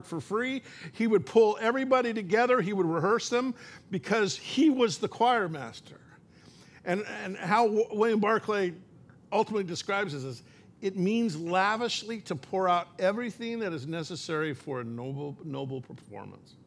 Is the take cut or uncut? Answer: uncut